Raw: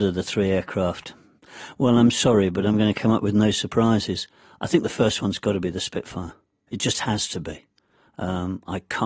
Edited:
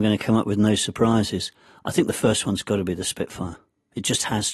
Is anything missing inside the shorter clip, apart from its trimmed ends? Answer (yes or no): no